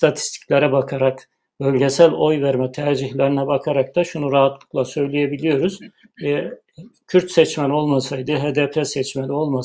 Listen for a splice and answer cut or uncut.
uncut